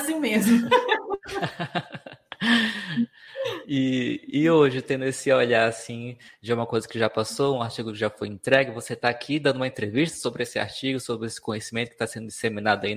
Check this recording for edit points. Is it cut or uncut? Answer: uncut